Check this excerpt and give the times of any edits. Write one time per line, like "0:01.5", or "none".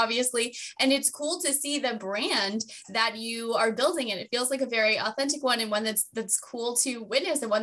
none